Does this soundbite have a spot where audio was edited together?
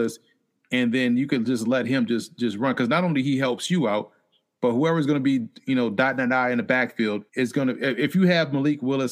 yes; 1 cut; at 7.3 s

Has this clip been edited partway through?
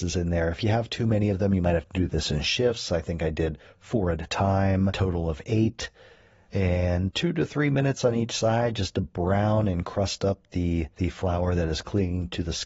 yes; 2 cuts; at 4.9 s, 10.9 s

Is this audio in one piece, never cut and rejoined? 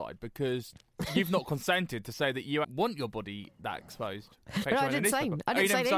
no; 2 cuts; at 2.6 s, 4.6 s

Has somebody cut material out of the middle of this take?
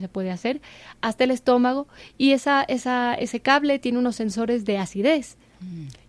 no; 0 cuts

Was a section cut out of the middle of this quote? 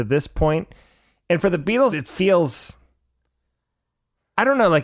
yes; 1 cut; at 1.9 s

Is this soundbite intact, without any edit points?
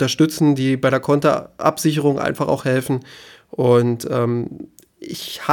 yes; 0 cuts

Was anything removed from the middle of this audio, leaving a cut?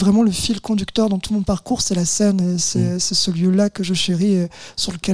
no; 0 cuts

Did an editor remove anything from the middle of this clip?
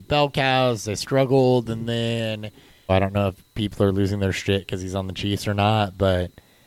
yes; 1 cut; at 2.9 s

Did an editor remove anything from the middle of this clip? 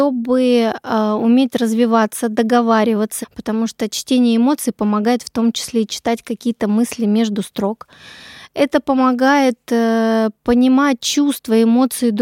yes; 1 cut; at 3.2 s

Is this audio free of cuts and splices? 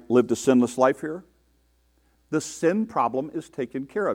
no; 1 cut; at 2.2 s

